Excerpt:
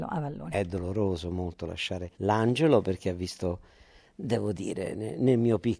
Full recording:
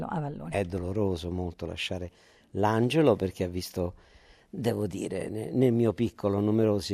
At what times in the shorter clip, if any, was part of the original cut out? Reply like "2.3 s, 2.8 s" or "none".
2.1 s